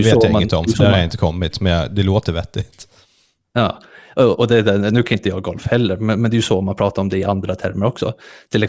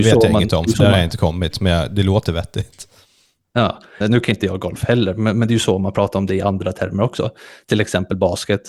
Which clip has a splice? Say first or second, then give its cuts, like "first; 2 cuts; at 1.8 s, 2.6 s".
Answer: second; 1 cut; at 4.0 s